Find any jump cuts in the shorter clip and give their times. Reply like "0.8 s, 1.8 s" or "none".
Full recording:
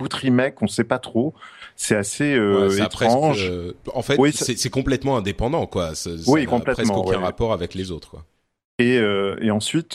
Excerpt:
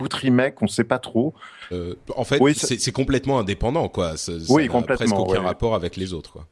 1.7 s